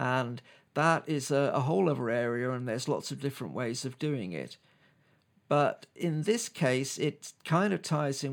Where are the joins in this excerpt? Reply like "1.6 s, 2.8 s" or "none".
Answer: none